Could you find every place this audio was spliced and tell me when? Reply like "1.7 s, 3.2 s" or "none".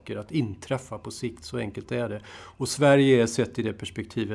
none